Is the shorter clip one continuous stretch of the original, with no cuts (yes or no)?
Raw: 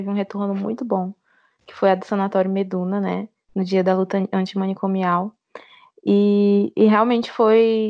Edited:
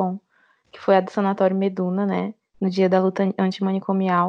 yes